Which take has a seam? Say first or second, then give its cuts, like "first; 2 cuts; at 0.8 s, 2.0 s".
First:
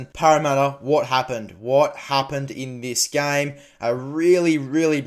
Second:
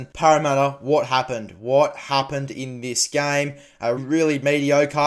second; 1 cut; at 4.0 s